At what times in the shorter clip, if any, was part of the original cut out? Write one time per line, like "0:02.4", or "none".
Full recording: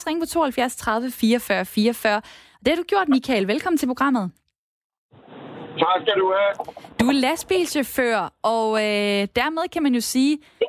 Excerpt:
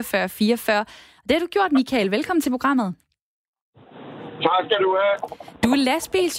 none